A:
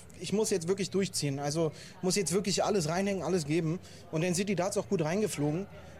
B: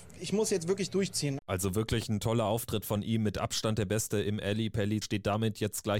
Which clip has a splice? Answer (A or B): B